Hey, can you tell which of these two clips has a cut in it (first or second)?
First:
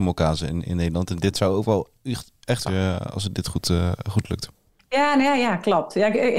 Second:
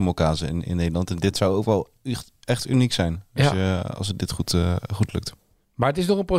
first